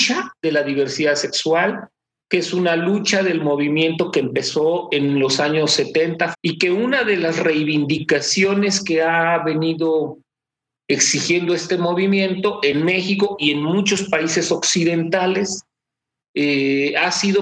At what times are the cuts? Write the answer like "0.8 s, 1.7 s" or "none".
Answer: 6.3 s